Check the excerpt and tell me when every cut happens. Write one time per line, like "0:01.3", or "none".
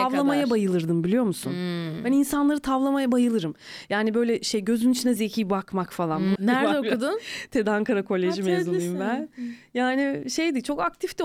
0:05.2
0:06.4